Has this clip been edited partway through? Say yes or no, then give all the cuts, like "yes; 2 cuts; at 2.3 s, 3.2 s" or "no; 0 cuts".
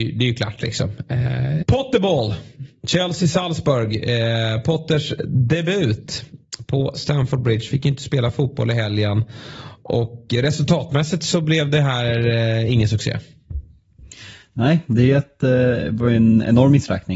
yes; 1 cut; at 1.6 s